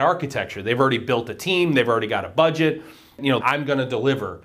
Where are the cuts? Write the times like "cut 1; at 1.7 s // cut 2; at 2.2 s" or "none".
cut 1; at 3.4 s